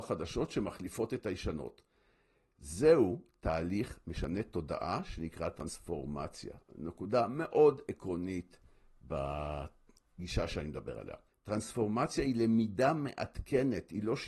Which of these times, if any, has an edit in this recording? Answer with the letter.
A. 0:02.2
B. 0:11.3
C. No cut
B